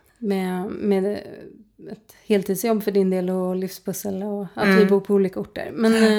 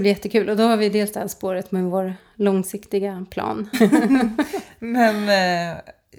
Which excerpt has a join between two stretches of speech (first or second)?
second